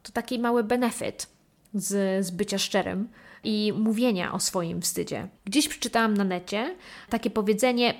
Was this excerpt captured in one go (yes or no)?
no